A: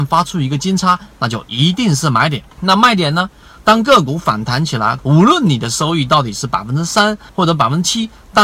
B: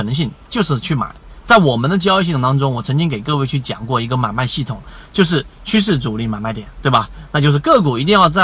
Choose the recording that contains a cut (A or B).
A